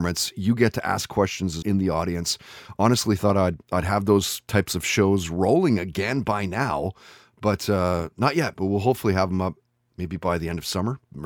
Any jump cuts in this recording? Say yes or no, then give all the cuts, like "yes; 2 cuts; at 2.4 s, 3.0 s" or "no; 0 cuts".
yes; 1 cut; at 1.6 s